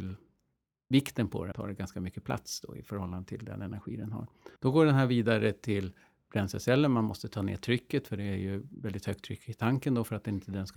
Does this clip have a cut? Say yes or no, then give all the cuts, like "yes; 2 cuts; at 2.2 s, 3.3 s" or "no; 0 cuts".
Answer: yes; 2 cuts; at 1.5 s, 4.6 s